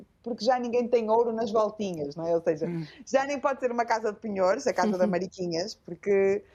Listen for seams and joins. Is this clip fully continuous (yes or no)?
yes